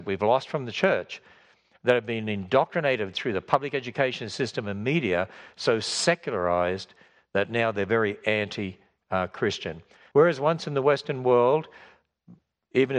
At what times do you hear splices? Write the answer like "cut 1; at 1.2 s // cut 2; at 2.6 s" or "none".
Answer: cut 1; at 10.1 s